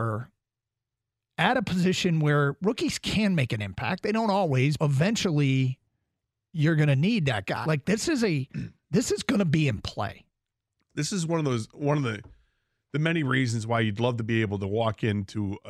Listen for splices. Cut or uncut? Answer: cut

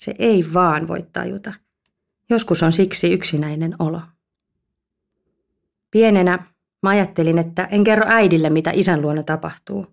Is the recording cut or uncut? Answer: uncut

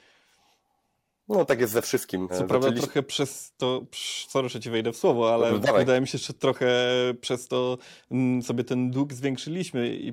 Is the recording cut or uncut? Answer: cut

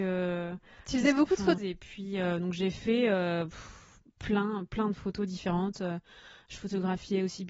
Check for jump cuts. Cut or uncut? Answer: cut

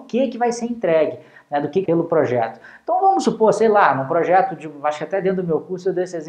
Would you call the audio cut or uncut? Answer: cut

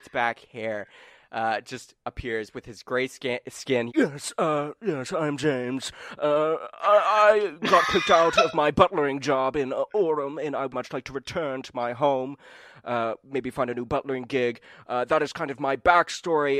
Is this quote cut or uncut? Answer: cut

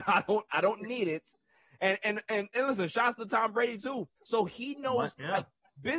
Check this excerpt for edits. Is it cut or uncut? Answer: cut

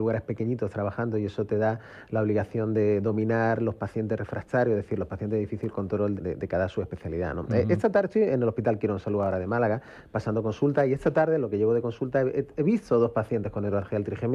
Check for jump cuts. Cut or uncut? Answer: cut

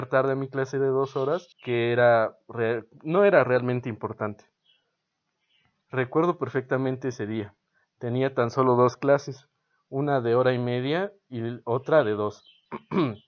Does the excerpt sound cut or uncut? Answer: cut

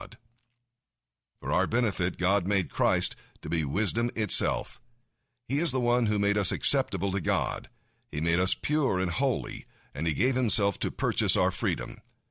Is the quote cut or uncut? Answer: cut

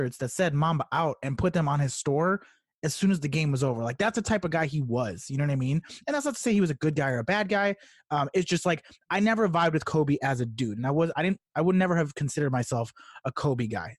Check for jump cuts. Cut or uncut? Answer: uncut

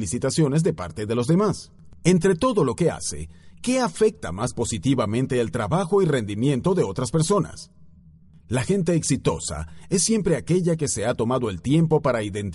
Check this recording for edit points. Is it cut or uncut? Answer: uncut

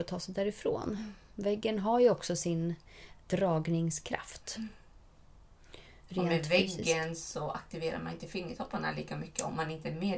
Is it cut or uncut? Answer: uncut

